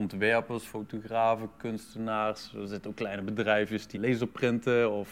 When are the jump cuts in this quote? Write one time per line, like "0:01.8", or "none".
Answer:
0:03.9